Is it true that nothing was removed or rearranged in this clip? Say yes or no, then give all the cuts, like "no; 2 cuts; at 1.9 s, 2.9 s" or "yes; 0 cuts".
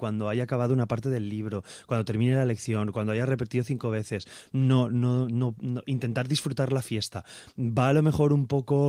yes; 0 cuts